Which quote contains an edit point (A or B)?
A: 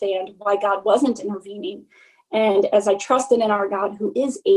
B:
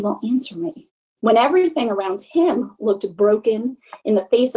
B